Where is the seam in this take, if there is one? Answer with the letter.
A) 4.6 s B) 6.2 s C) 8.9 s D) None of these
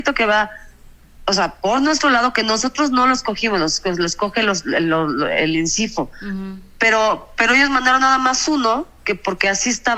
D